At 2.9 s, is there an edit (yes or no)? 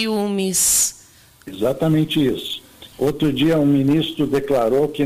yes